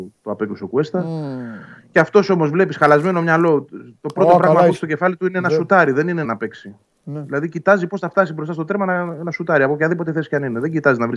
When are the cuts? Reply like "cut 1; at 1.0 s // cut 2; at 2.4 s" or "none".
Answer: cut 1; at 6.2 s